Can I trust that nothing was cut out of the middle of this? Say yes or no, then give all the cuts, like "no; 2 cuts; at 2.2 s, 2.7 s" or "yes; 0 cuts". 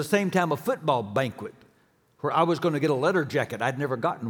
yes; 0 cuts